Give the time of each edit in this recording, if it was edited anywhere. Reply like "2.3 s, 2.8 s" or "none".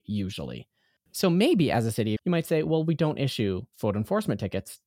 1.1 s, 2.2 s